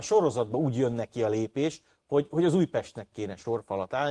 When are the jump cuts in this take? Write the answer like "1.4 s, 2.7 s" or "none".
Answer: none